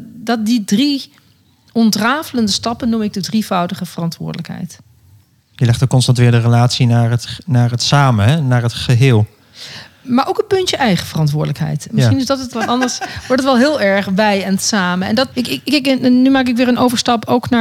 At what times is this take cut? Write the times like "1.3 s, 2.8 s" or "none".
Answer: 12.5 s, 15.3 s